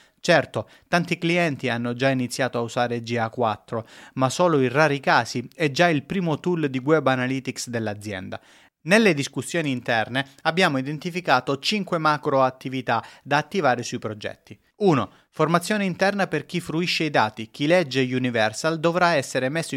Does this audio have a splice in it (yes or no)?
no